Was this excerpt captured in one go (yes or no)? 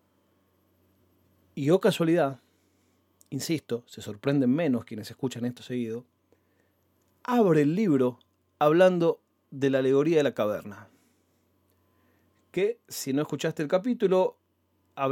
yes